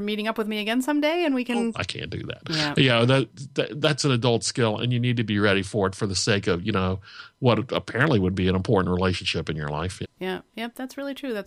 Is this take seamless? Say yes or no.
no